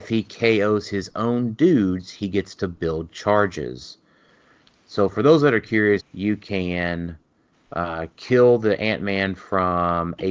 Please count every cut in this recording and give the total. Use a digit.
1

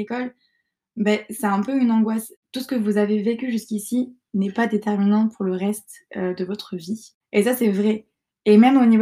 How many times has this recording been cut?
0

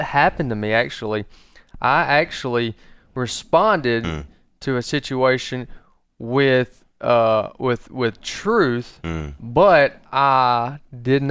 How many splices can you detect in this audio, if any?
0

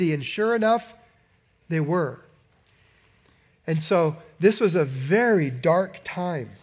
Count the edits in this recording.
0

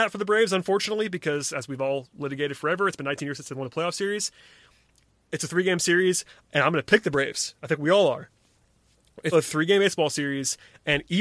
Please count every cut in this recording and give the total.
2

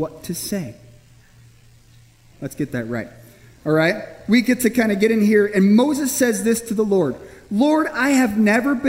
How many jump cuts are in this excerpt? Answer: 1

